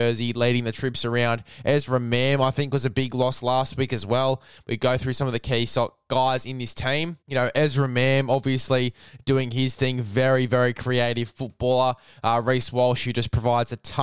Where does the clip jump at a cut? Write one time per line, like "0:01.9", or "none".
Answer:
0:07.2